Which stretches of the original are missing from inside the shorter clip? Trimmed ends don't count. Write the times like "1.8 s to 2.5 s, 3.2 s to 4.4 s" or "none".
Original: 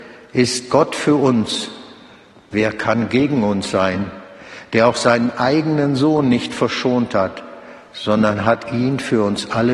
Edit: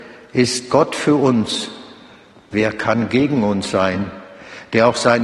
none